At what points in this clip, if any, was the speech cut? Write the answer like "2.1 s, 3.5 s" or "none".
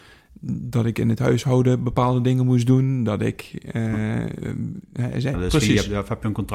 5.3 s